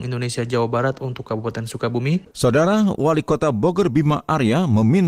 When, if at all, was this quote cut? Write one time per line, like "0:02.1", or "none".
0:02.3